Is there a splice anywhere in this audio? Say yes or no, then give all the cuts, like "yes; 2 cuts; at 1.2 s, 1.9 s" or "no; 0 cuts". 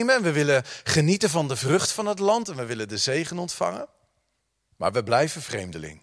yes; 1 cut; at 2.4 s